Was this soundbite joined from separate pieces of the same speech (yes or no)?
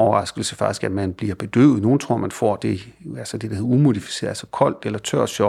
no